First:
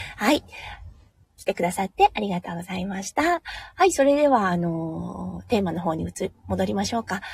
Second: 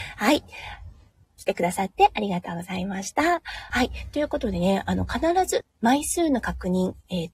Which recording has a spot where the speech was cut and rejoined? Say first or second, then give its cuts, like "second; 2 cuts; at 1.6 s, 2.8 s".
second; 2 cuts; at 3.7 s, 5.6 s